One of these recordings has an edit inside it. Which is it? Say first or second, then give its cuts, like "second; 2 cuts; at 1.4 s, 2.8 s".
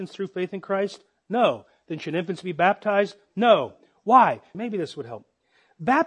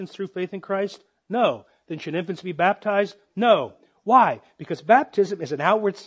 first; 1 cut; at 4.5 s